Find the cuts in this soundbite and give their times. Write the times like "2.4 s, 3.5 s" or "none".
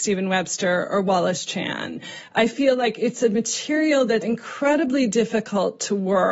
4.2 s